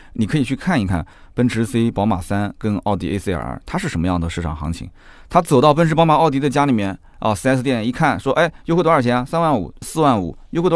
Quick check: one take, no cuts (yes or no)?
no